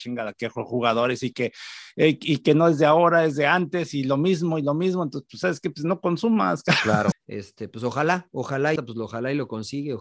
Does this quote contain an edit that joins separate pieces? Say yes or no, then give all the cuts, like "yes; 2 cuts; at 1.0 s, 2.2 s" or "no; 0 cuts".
yes; 2 cuts; at 7.1 s, 8.8 s